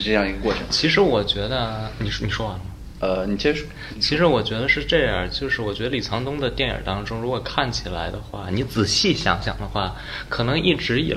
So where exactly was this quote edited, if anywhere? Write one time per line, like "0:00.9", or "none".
none